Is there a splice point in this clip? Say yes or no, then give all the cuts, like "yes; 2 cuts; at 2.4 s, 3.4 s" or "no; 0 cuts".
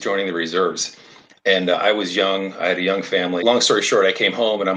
yes; 1 cut; at 3.4 s